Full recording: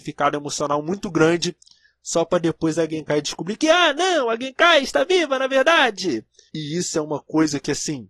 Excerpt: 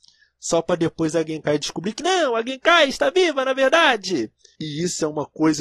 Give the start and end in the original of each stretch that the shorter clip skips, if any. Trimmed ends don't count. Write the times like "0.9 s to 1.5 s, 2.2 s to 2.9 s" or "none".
3.6 s to 3.9 s